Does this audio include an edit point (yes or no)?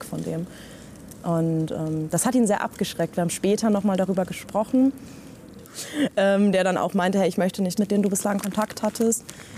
yes